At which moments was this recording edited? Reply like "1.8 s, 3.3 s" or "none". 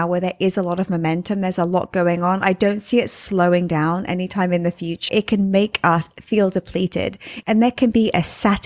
5.1 s, 7.4 s